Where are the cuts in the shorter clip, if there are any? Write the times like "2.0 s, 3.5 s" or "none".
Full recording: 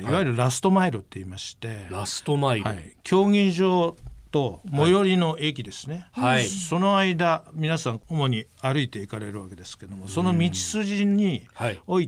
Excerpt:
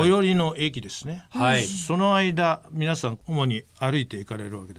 none

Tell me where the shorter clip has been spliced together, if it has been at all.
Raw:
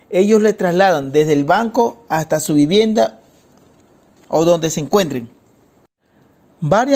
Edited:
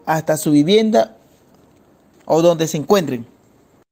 none

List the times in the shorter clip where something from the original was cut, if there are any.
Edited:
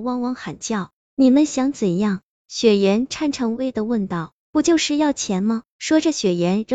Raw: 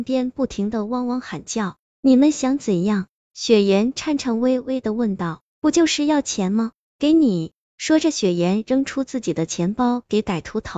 3.5 s, 5.7 s

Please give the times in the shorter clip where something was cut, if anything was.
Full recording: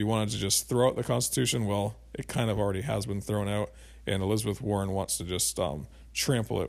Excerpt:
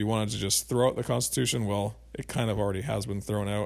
none

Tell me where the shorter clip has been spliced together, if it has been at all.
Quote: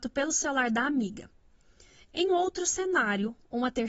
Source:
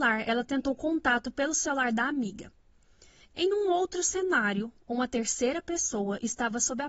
2.3 s

